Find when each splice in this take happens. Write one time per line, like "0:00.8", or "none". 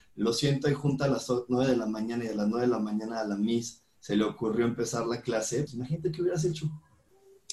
0:05.7